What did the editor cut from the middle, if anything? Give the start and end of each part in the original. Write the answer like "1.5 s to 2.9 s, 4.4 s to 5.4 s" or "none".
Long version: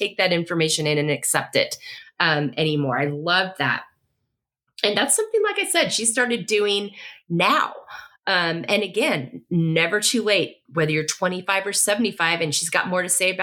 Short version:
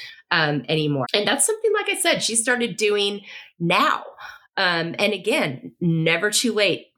2.9 s to 4.7 s